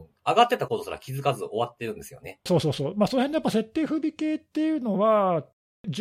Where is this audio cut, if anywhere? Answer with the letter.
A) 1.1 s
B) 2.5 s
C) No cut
B